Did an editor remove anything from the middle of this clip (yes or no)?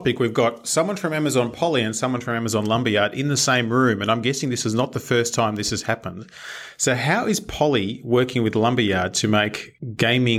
no